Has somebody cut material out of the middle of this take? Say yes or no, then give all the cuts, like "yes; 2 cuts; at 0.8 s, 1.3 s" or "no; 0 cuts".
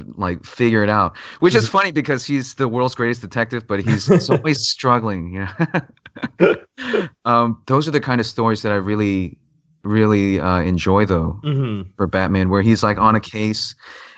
yes; 1 cut; at 7.6 s